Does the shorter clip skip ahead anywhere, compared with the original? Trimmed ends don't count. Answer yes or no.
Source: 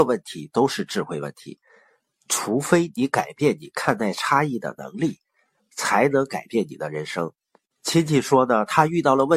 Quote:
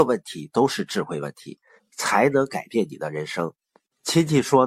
yes